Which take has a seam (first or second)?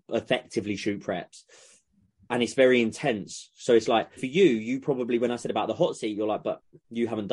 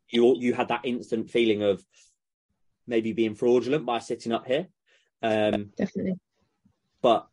first